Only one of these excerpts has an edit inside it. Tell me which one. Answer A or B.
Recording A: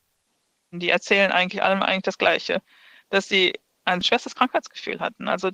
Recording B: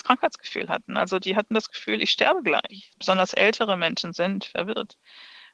B